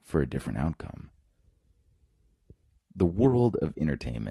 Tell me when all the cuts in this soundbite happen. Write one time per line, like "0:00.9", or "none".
0:02.8

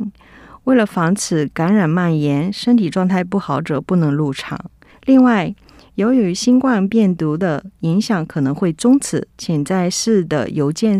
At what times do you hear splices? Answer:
0:04.9
0:09.3

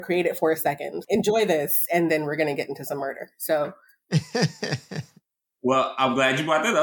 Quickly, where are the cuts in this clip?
0:01.0

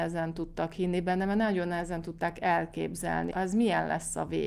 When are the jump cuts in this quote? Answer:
0:03.3

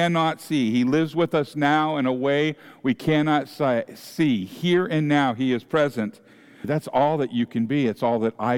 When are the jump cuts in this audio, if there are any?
0:06.6

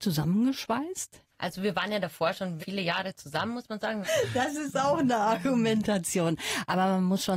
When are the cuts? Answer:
0:02.6
0:04.0

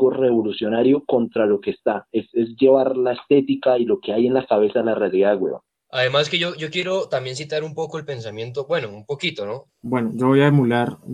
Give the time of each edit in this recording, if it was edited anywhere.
0:05.7
0:09.7

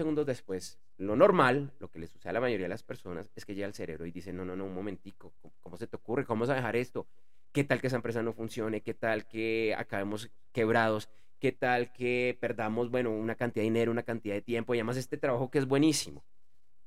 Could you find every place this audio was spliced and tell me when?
none

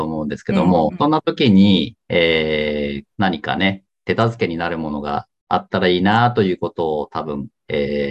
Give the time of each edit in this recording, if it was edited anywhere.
0:03.1

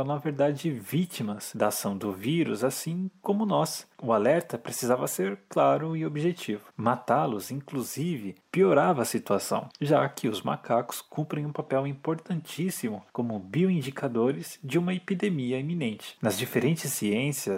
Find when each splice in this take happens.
0:13.1
0:16.2

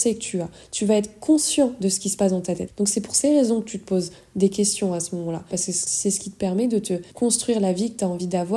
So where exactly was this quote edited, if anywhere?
0:02.7
0:05.5
0:07.1

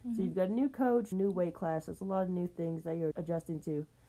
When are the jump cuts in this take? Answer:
0:01.1
0:03.1

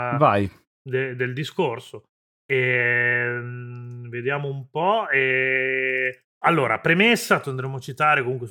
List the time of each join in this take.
0:06.3
0:07.4

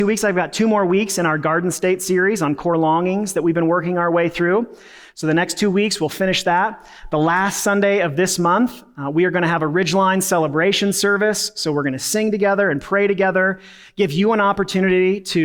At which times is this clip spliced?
none

